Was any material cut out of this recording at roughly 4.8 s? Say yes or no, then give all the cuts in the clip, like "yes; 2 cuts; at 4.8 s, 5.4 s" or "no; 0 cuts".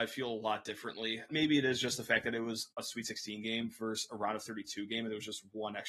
no; 1 cut; at 1.3 s